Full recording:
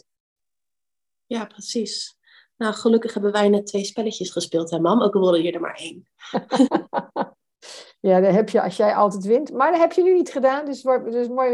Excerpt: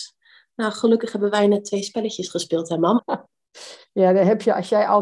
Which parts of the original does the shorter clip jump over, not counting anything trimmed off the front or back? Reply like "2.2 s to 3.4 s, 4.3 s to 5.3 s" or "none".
5.0 s to 7.1 s